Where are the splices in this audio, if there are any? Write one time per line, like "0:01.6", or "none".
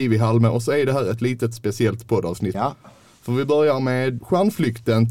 0:02.5
0:04.2